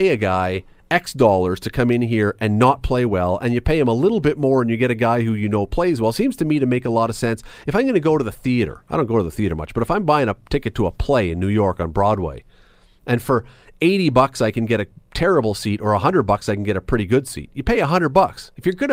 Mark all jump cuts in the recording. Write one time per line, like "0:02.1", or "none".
none